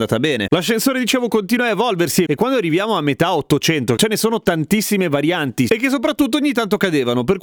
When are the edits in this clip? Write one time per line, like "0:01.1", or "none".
0:04.0
0:05.7